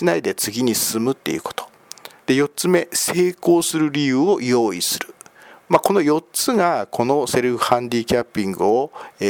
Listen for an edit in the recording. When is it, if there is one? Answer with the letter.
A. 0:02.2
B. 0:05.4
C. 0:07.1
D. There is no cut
A